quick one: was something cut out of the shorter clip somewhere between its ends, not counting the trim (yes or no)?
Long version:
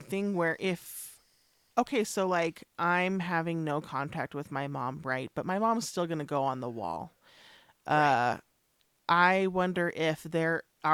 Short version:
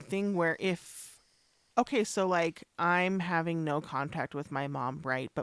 no